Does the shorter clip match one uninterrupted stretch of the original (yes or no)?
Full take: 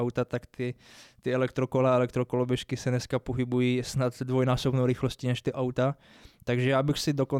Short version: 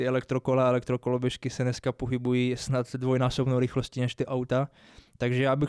yes